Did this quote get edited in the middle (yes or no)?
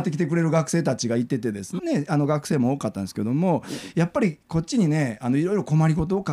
yes